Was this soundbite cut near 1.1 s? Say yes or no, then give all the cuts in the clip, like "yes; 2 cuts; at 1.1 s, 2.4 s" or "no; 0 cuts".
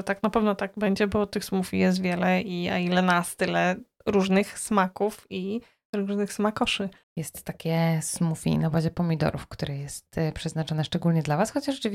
no; 1 cut; at 7.0 s